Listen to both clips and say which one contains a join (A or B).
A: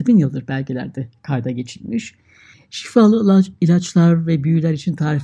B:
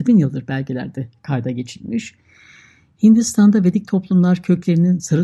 A